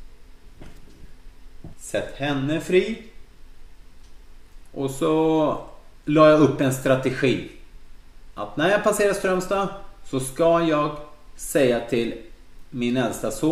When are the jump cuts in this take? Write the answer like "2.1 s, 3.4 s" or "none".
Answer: 1.7 s, 4.7 s